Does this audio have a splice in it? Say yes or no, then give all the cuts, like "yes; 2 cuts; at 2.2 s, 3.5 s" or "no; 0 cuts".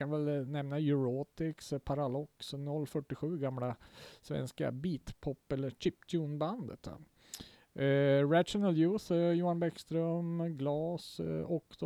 no; 0 cuts